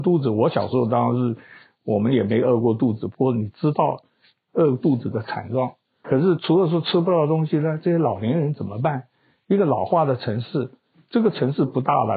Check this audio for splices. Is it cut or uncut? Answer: cut